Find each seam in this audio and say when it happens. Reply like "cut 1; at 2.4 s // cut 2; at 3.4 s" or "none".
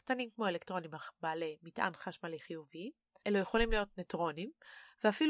cut 1; at 3.2 s